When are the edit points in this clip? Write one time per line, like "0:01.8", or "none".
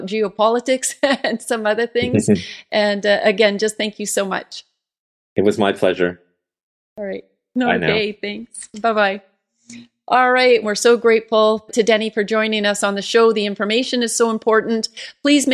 0:10.6
0:11.7